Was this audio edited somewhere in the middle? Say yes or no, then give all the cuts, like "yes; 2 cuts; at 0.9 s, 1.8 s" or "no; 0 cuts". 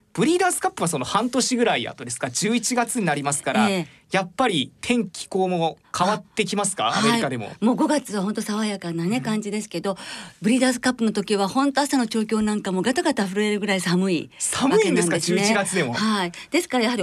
yes; 1 cut; at 5.1 s